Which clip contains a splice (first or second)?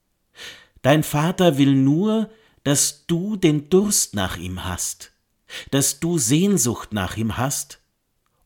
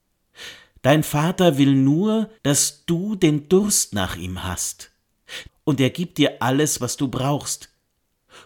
second